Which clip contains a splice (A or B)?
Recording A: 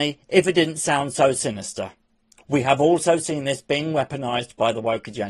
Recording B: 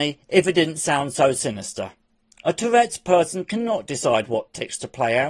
A